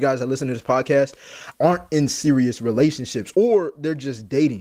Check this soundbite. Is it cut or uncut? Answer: cut